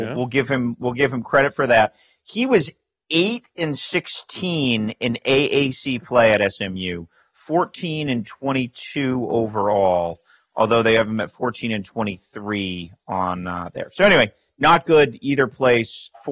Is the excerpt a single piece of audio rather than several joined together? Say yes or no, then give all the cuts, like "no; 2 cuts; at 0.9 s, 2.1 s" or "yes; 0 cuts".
yes; 0 cuts